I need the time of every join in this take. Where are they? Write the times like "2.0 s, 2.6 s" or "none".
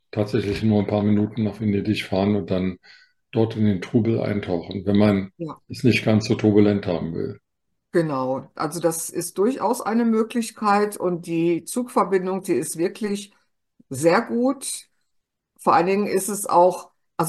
none